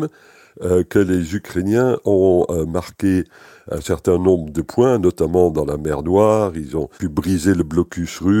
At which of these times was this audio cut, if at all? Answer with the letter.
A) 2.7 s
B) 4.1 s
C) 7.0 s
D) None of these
C